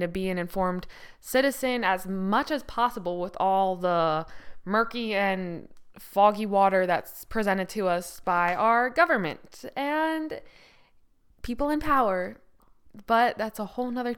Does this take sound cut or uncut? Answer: uncut